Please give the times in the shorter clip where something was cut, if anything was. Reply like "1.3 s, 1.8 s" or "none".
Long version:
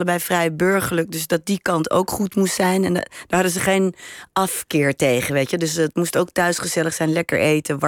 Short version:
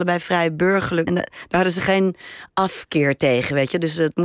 1.1 s